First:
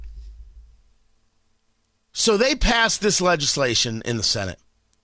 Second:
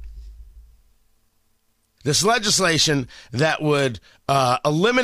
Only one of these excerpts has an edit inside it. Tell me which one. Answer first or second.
second